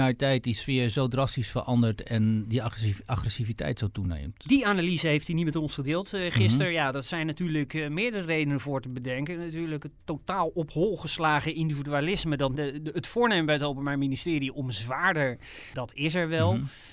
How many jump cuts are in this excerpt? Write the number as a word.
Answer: two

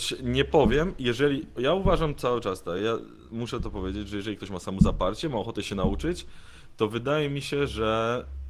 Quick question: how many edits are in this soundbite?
zero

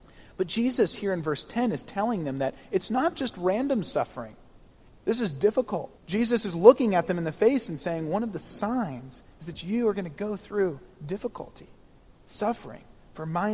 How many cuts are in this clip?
two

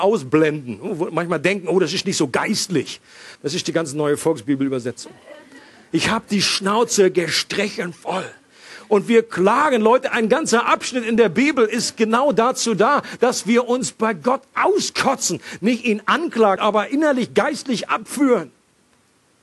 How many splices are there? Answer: two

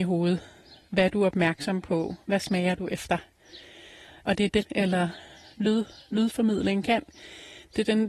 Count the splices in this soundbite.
one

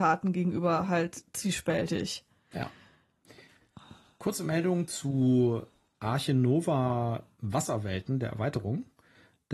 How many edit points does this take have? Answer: zero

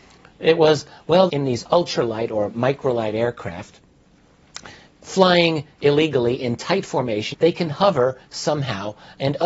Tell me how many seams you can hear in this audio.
two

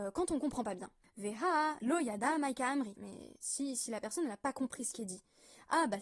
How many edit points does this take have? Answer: two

